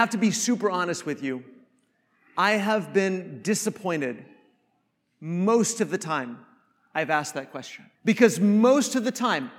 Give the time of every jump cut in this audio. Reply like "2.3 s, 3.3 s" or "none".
8.0 s